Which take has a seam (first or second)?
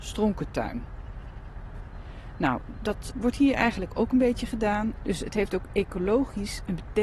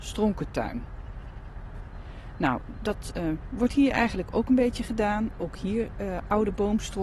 first